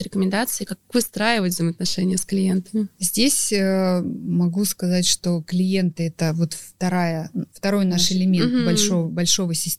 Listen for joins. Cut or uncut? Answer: cut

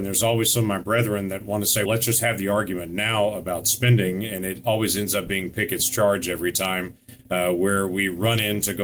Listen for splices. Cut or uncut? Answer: cut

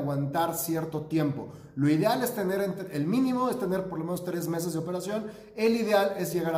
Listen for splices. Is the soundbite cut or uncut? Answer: uncut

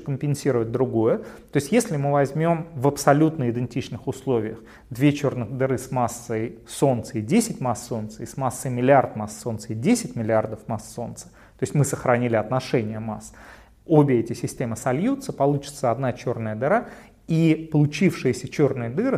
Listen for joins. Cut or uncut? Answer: uncut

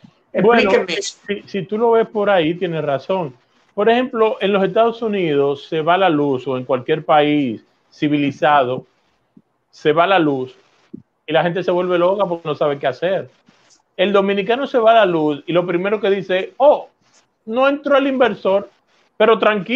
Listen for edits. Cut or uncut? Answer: uncut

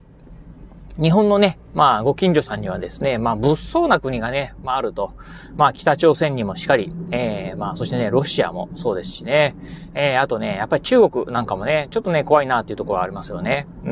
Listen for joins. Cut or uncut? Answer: uncut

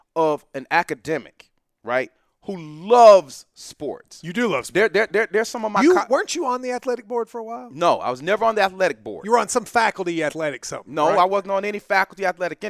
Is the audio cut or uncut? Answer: uncut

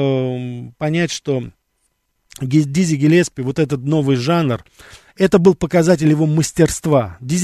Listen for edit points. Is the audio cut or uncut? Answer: uncut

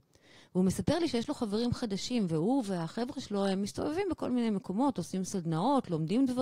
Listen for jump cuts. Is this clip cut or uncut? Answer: uncut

